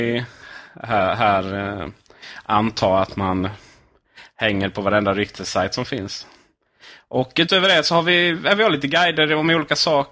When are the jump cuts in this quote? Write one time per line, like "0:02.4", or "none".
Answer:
none

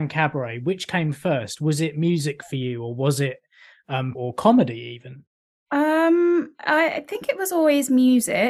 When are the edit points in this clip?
0:04.1

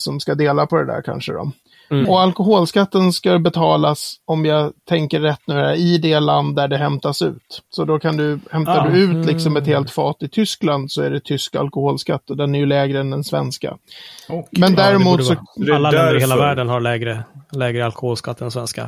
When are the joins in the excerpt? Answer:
0:02.0

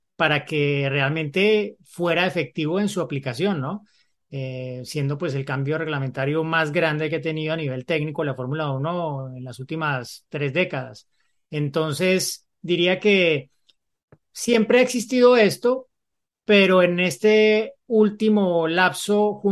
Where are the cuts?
none

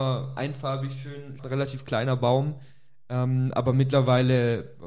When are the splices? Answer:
0:01.4

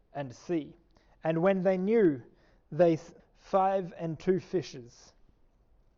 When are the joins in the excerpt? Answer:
0:03.2

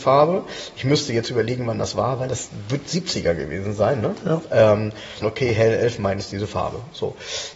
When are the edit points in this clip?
0:05.2

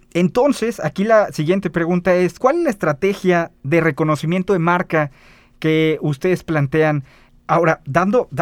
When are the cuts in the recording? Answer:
0:02.4
0:07.3

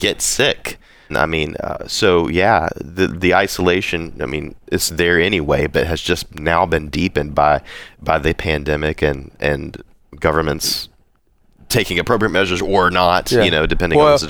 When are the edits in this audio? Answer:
0:01.1

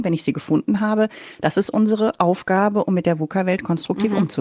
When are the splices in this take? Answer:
none

